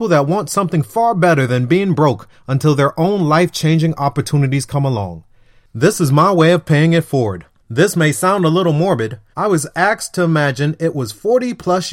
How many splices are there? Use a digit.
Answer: 2